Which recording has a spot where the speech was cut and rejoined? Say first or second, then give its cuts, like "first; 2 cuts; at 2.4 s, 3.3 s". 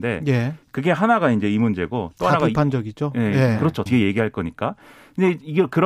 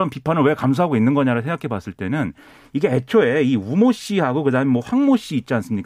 first; 1 cut; at 3.9 s